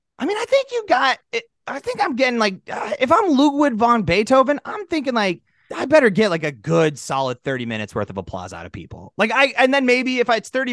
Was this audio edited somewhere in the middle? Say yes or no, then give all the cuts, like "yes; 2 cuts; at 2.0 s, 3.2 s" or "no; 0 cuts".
no; 0 cuts